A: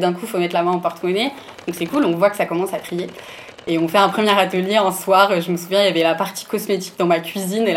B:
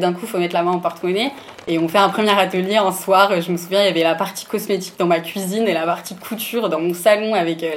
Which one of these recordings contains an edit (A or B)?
B